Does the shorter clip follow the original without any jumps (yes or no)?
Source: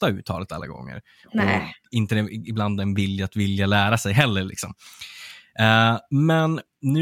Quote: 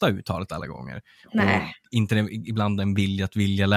yes